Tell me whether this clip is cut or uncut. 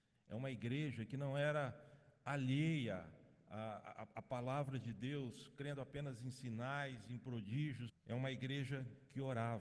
cut